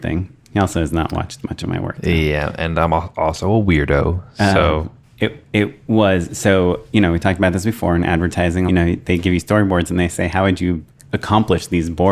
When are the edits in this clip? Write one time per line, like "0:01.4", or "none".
0:05.0
0:08.7

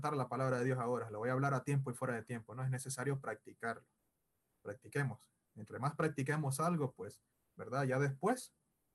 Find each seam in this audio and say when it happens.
none

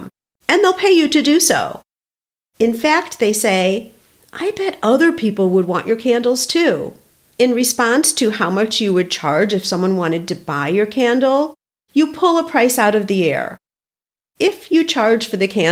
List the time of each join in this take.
0:07.2

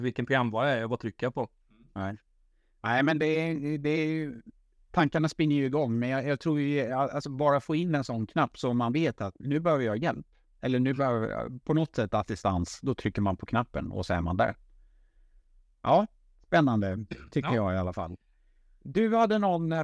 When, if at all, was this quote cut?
none

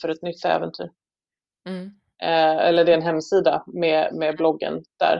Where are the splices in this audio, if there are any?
0:02.1

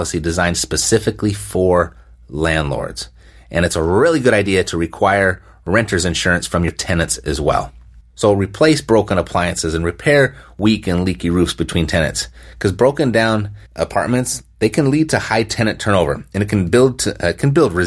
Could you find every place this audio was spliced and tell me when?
0:08.0
0:13.7

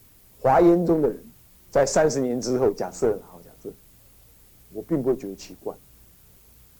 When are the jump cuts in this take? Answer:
none

